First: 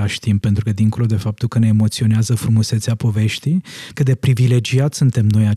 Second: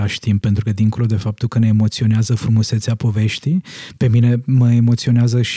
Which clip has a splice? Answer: first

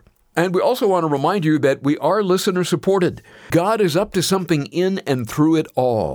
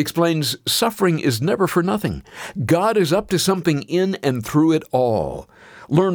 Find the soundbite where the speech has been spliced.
first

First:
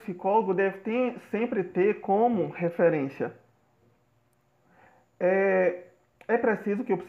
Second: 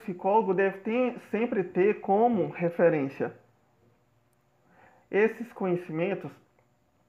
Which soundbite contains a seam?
second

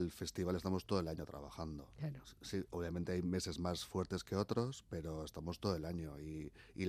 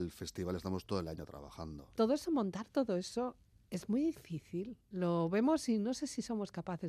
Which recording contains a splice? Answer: second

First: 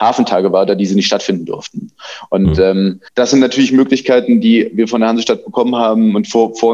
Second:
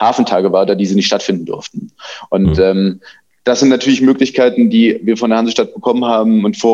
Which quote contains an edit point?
first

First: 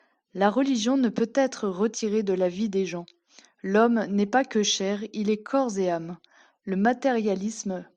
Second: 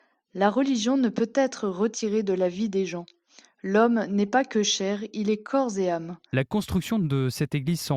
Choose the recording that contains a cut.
second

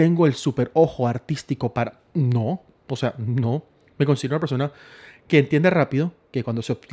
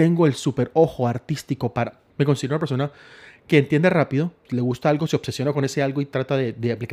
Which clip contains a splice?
second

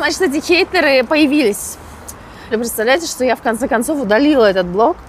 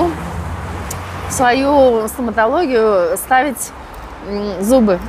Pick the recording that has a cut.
first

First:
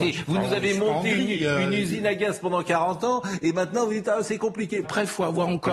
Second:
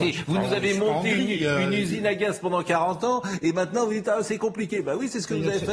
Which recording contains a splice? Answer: first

